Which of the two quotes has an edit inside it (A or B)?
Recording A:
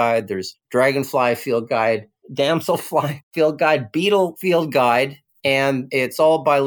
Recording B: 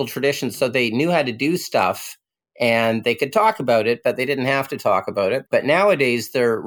B